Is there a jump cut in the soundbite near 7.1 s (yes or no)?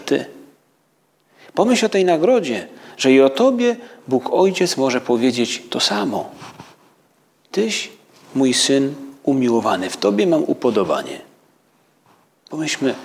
no